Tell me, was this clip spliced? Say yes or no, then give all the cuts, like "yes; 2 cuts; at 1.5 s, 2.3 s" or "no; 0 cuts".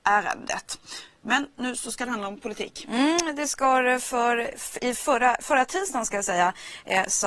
no; 0 cuts